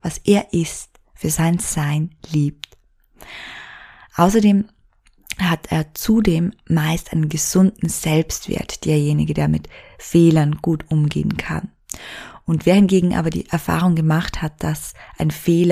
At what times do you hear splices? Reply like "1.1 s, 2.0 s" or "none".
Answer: none